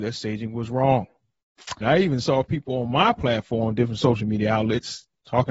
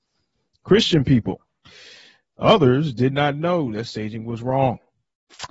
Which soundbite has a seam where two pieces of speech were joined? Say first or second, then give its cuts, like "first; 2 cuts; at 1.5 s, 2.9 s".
first; 1 cut; at 1.8 s